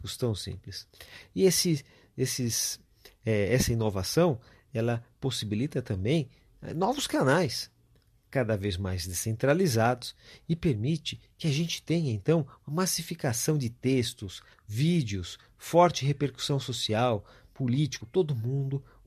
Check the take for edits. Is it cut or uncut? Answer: cut